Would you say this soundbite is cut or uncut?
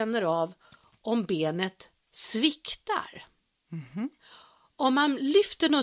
uncut